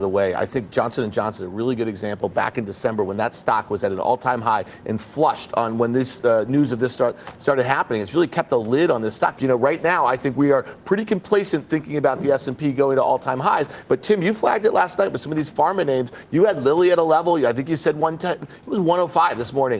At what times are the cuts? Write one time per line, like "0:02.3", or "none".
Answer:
0:09.4